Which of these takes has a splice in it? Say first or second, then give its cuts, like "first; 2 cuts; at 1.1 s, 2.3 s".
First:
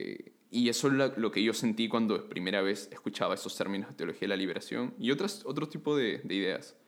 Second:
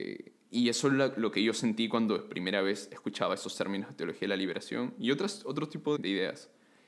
second; 1 cut; at 6.0 s